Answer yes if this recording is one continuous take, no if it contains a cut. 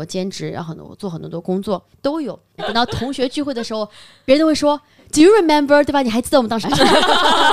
no